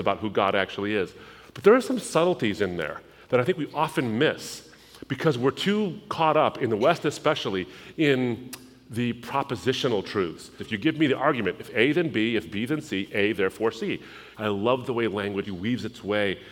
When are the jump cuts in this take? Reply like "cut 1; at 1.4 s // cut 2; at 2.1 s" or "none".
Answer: cut 1; at 10.6 s // cut 2; at 14.3 s // cut 3; at 15.5 s